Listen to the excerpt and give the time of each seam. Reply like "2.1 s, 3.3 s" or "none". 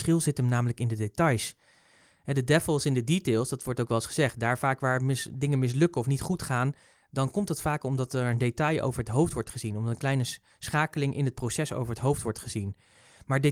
none